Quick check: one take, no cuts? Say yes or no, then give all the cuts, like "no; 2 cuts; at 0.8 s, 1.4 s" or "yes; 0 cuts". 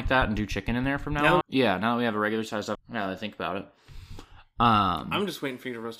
no; 2 cuts; at 1.4 s, 2.8 s